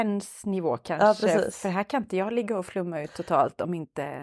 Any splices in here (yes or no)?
no